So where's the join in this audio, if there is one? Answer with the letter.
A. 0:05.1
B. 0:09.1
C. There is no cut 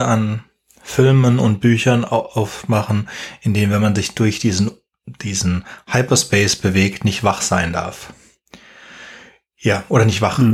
C